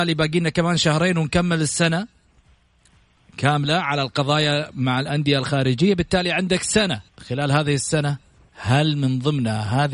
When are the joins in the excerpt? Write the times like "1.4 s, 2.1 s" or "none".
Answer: 7.1 s